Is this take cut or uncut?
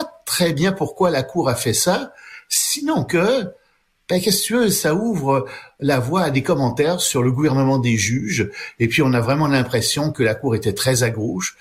uncut